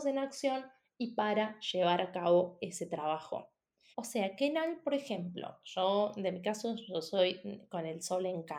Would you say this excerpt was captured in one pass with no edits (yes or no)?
no